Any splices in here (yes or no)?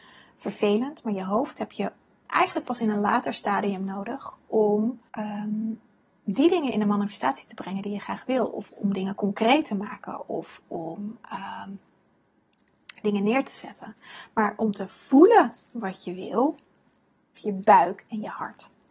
yes